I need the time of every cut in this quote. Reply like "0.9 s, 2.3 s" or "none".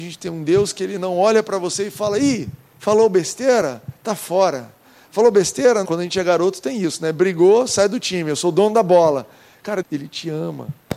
5.8 s, 9.8 s